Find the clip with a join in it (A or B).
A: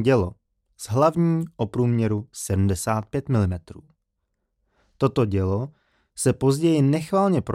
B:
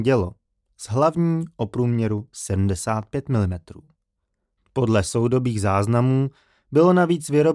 B